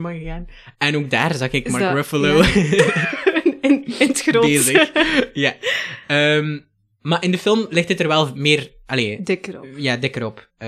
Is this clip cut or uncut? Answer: uncut